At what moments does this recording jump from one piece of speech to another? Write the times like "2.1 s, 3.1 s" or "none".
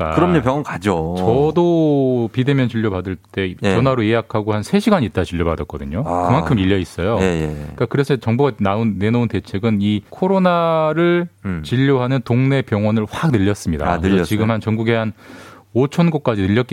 10.1 s

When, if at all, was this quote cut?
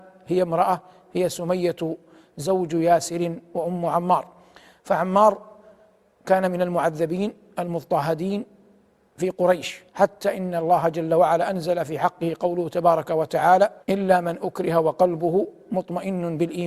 9.9 s, 13.8 s

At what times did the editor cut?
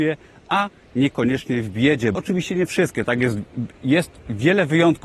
2.1 s

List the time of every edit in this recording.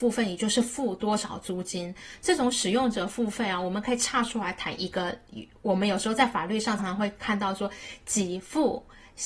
6.8 s

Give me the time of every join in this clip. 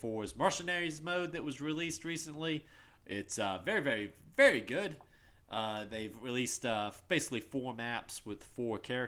none

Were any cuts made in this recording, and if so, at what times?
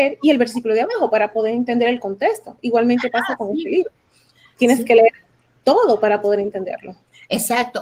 none

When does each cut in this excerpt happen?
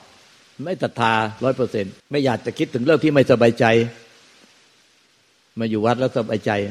2.0 s

